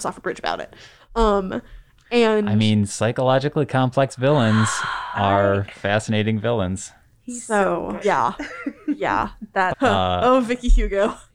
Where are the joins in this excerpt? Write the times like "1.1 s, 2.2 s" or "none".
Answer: 8.0 s, 9.7 s